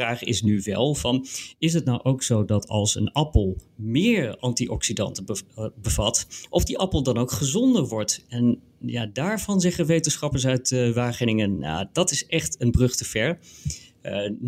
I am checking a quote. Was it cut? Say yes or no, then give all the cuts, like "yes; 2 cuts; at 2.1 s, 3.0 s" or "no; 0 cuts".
no; 0 cuts